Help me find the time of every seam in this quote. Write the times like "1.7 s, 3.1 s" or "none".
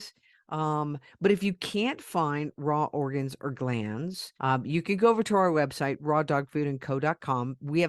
4.4 s

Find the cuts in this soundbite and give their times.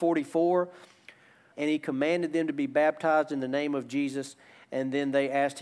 1.5 s

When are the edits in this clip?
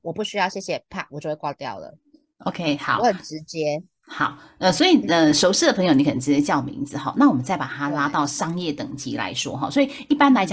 none

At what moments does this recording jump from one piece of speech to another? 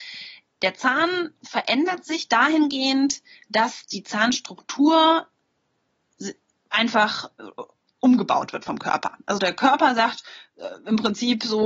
none

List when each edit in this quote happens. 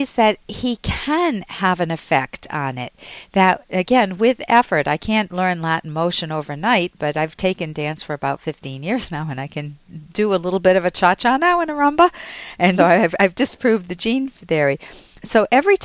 12.8 s

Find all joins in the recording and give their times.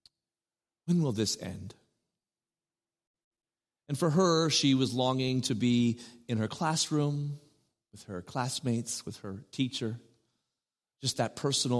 3.7 s

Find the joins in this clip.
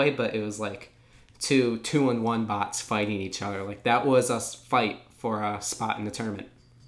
none

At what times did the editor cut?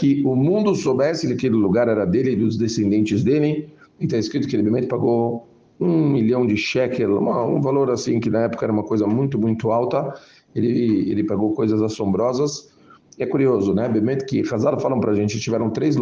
none

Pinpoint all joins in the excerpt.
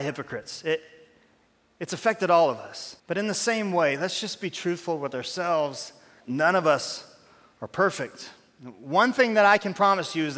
3.0 s, 6.2 s

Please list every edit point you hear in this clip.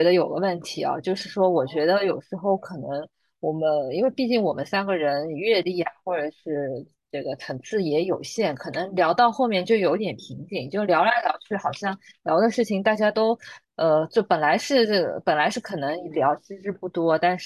none

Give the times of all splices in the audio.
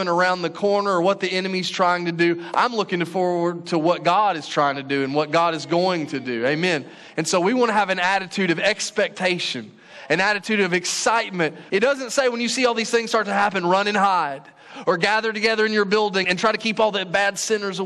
11.7 s, 16.2 s

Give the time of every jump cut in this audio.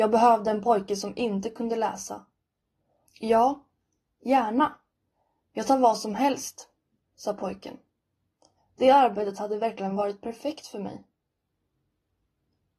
3.1 s, 8.6 s

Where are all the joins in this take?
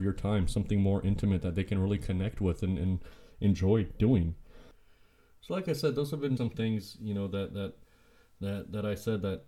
6.4 s

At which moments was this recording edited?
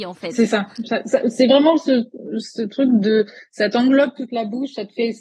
none

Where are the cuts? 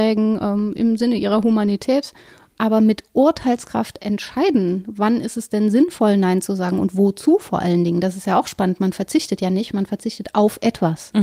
none

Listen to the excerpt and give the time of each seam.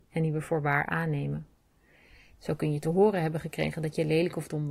2.3 s

